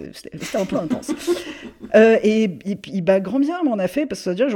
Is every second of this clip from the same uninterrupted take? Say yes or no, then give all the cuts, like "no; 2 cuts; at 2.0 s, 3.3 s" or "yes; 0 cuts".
yes; 0 cuts